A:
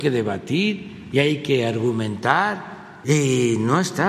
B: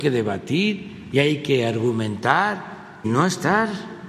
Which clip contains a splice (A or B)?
B